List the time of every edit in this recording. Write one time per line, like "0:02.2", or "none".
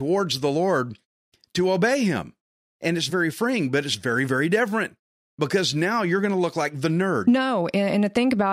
0:03.1
0:07.2